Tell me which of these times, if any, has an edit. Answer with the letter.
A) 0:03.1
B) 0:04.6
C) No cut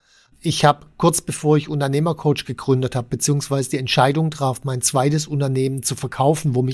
C